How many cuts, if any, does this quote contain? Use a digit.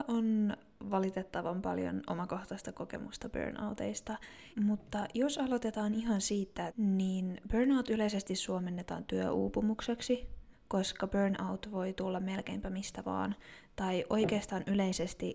3